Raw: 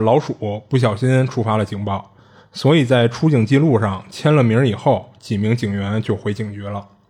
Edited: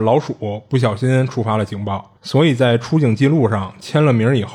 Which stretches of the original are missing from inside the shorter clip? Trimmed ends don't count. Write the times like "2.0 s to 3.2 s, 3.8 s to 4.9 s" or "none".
2.2 s to 2.5 s